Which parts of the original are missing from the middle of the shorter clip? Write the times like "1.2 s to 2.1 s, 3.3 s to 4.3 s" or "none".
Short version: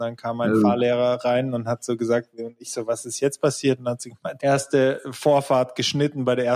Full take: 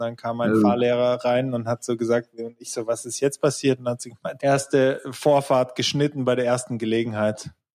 none